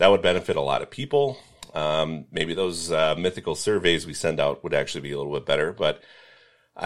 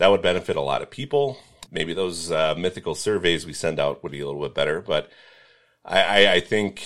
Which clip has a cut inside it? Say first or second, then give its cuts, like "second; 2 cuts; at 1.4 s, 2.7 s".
second; 2 cuts; at 1.7 s, 4.1 s